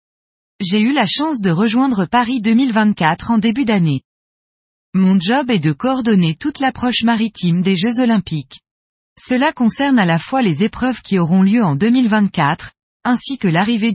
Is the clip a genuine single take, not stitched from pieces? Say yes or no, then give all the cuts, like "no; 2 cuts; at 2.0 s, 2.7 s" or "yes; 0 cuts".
no; 1 cut; at 12.9 s